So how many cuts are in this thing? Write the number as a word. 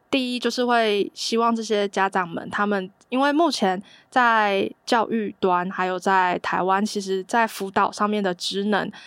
zero